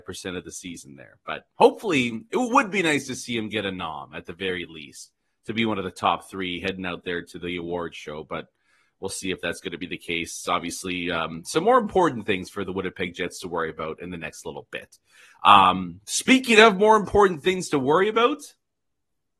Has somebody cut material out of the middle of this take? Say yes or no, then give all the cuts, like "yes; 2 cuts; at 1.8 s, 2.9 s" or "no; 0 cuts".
no; 0 cuts